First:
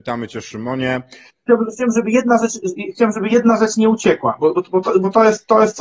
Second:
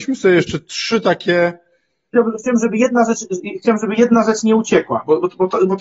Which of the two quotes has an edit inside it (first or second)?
first